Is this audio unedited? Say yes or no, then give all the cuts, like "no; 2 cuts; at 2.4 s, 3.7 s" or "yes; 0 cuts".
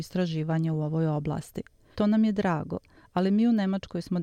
no; 1 cut; at 1.9 s